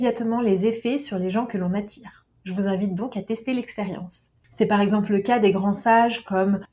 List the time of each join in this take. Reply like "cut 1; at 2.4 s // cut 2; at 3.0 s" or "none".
cut 1; at 4.3 s